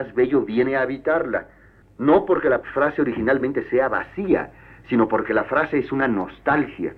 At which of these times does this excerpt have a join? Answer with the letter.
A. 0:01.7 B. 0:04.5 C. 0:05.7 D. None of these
D